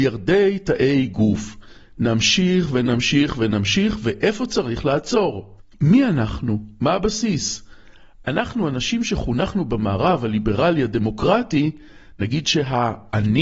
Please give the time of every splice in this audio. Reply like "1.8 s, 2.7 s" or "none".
none